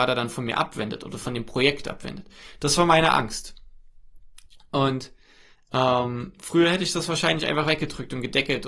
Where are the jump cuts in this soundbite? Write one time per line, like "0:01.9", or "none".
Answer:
none